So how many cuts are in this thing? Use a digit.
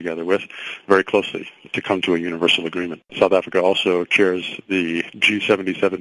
1